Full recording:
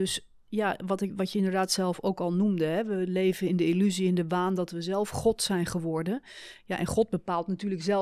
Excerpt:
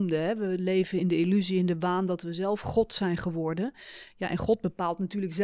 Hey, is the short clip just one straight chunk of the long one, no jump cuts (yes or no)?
yes